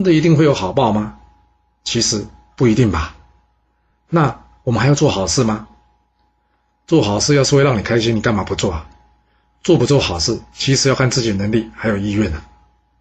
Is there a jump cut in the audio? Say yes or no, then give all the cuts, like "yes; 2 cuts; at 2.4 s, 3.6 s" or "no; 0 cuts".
no; 0 cuts